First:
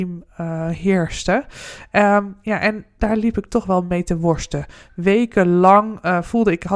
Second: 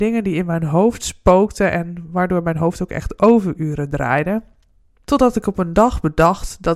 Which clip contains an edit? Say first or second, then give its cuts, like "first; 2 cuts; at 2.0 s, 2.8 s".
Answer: second; 1 cut; at 5.0 s